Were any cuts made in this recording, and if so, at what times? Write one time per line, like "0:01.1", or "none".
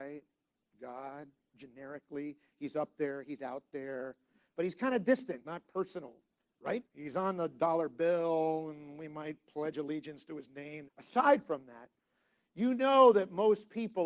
0:05.4
0:06.9
0:10.9